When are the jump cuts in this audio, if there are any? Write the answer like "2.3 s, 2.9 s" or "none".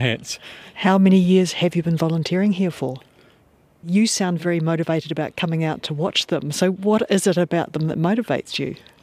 3.8 s